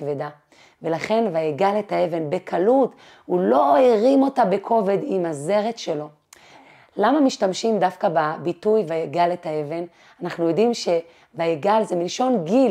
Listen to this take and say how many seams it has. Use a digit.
0